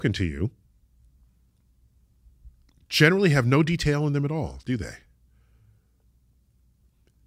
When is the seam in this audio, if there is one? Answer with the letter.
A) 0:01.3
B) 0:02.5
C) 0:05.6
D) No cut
D